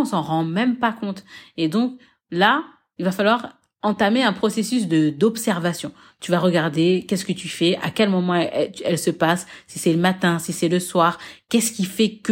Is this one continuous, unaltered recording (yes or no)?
yes